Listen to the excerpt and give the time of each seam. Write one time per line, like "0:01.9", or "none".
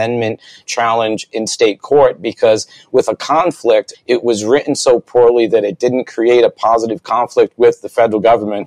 0:03.9